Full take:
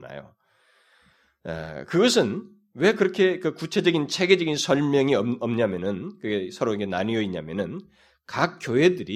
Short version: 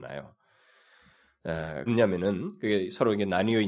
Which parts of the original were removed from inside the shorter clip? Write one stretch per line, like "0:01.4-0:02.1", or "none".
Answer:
0:01.9-0:05.5